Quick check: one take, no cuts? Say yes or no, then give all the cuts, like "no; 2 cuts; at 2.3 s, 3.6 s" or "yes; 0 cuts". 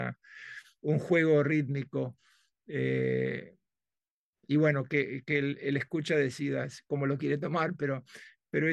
yes; 0 cuts